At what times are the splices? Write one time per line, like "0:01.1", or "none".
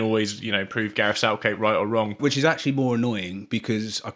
0:02.2